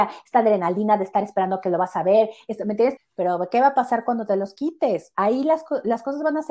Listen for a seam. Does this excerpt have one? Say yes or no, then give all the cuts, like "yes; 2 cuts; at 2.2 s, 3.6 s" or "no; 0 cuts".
yes; 1 cut; at 3.0 s